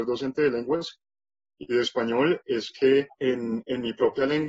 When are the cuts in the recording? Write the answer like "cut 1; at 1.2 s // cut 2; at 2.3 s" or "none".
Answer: cut 1; at 3.1 s